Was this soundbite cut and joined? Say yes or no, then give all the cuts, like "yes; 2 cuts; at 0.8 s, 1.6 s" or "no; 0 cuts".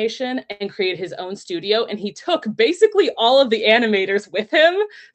no; 0 cuts